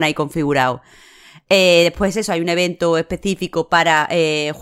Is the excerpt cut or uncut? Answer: uncut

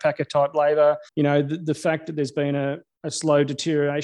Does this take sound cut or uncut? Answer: cut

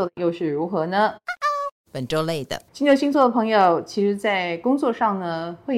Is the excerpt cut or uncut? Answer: cut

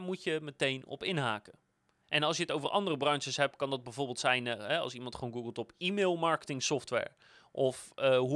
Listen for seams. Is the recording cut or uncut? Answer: uncut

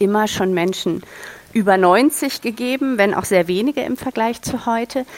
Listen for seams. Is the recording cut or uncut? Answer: uncut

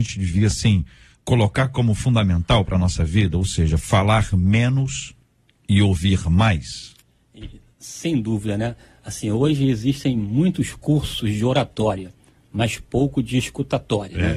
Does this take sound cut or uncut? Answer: uncut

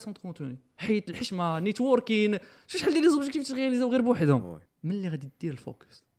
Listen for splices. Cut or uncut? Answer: cut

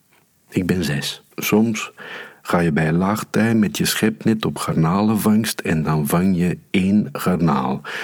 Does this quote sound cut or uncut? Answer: cut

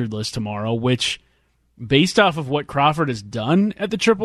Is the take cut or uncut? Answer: uncut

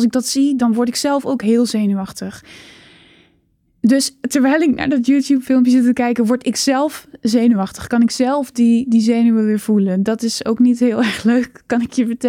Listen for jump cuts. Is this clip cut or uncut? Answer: uncut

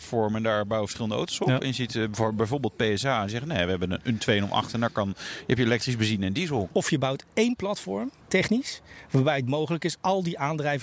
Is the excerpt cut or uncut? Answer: cut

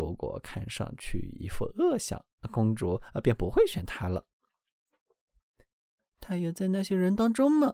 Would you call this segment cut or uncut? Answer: cut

